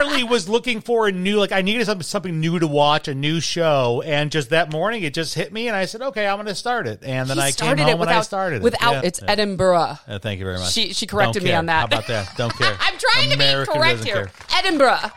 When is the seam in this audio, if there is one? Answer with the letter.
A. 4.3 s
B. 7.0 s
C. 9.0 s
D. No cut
C